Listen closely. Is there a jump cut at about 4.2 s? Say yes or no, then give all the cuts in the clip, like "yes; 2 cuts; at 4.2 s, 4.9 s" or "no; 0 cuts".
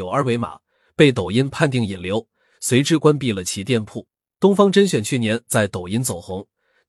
no; 0 cuts